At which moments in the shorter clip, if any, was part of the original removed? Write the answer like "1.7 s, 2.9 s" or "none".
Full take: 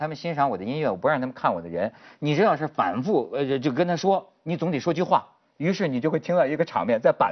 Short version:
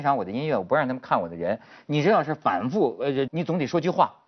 3.3 s